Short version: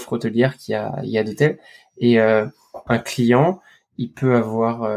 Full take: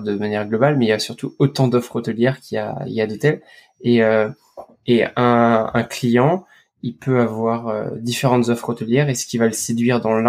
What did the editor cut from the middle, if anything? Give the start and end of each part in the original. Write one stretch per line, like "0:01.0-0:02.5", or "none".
0:04.7-0:05.7